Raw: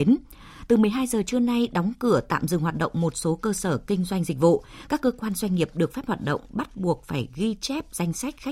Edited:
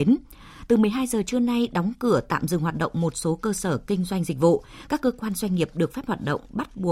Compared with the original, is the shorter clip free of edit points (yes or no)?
yes